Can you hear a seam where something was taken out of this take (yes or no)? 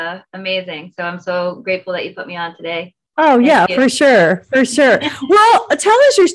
no